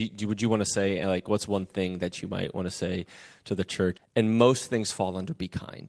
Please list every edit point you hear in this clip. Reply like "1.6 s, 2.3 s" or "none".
4.0 s